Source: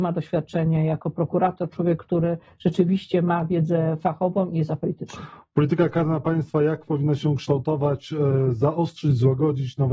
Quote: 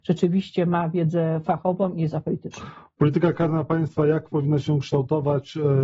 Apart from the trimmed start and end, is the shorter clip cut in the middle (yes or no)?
no